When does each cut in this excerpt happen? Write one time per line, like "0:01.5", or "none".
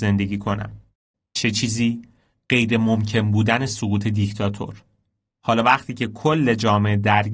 0:01.1
0:05.4